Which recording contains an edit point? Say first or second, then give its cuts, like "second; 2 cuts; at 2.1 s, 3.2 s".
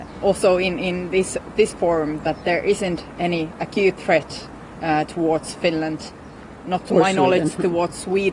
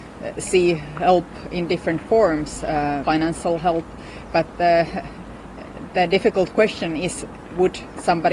second; 1 cut; at 3.0 s